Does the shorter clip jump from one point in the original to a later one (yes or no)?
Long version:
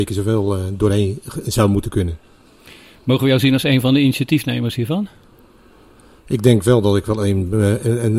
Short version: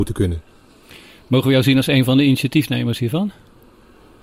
no